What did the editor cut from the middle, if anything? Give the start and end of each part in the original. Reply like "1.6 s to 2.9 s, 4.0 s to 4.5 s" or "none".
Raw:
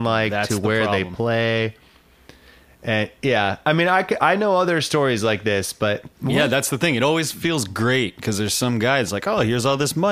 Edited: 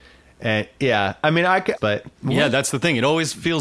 4.2 s to 5.7 s